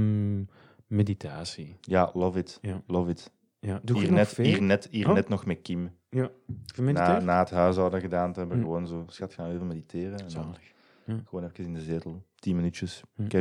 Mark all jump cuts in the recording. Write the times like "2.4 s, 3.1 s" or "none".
none